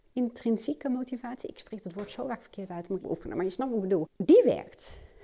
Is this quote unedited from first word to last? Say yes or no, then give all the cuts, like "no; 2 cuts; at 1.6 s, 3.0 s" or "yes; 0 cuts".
no; 2 cuts; at 3.0 s, 4.1 s